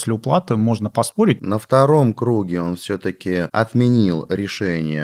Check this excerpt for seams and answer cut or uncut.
cut